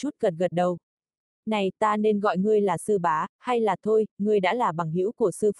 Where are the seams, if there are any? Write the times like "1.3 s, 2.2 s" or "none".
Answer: 1.3 s